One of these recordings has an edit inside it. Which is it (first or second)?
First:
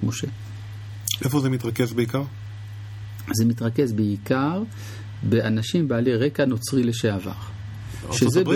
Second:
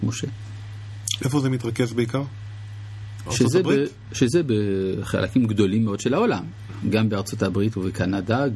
second